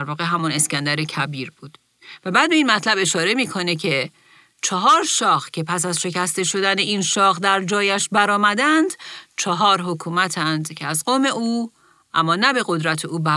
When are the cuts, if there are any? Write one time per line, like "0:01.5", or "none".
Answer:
none